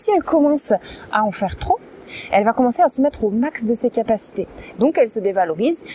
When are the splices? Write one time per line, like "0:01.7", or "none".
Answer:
0:04.7